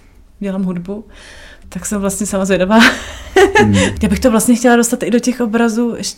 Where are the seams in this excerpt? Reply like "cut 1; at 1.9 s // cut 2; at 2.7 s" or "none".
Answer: cut 1; at 1.6 s // cut 2; at 4.0 s

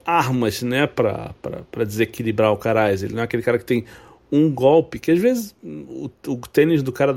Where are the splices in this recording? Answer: none

